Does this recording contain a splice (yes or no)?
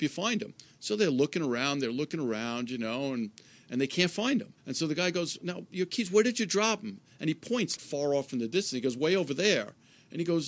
yes